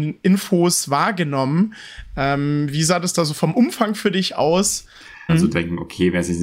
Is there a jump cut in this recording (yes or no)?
yes